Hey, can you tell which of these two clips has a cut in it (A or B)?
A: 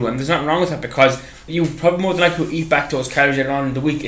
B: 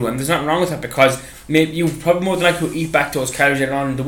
A